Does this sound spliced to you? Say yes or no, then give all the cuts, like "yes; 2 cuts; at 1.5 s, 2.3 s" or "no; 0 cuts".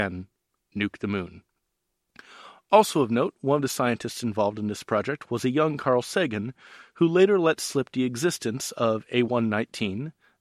no; 0 cuts